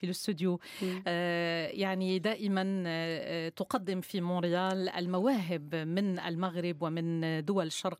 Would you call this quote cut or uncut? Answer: uncut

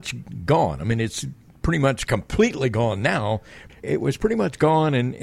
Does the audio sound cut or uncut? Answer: cut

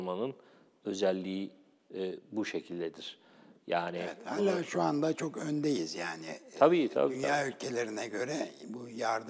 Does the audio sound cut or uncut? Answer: uncut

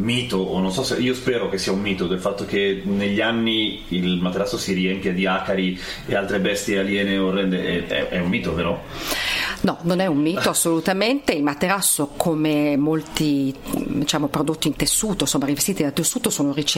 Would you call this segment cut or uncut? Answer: uncut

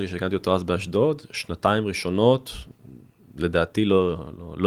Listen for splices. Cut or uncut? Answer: uncut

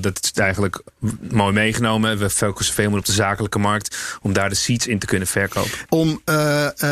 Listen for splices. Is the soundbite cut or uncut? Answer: cut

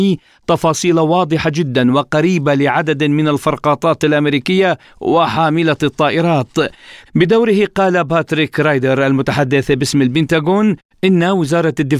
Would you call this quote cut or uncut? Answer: cut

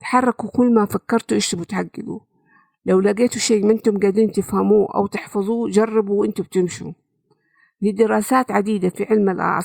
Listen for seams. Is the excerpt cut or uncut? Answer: uncut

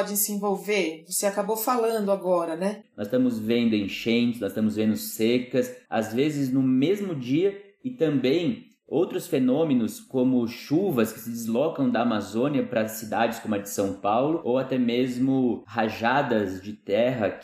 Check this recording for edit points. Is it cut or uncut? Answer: cut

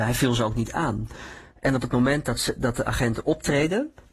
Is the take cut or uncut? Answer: uncut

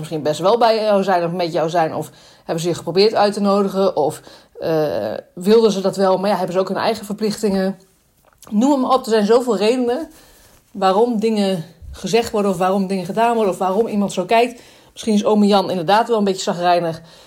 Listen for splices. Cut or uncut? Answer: uncut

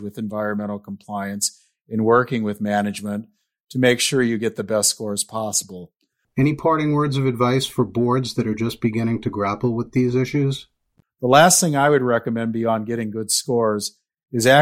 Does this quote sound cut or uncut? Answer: cut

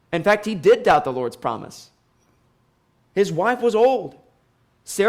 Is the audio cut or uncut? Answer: cut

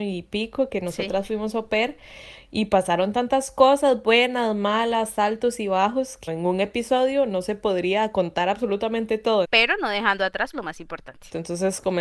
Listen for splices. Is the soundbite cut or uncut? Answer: cut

